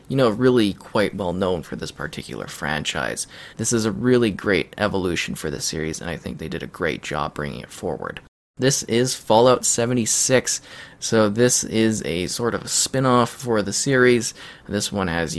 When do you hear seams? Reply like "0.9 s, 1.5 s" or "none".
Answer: 3.5 s